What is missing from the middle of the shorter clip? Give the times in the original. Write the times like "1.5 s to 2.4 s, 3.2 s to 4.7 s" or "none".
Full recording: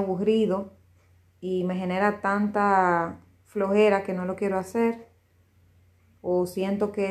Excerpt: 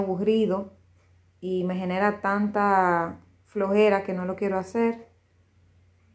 none